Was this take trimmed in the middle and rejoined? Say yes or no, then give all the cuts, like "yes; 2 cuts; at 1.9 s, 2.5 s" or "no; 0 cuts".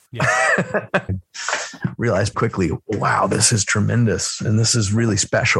yes; 2 cuts; at 1.1 s, 2.3 s